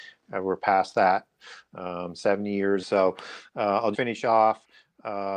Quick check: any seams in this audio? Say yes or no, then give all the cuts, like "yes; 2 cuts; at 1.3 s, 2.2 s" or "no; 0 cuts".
yes; 2 cuts; at 2.8 s, 3.9 s